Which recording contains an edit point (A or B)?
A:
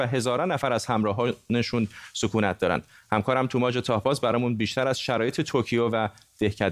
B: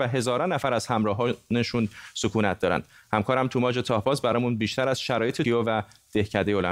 B